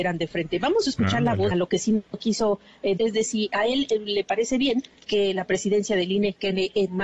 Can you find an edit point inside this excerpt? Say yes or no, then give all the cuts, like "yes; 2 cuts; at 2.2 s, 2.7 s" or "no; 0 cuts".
yes; 2 cuts; at 1.5 s, 3.0 s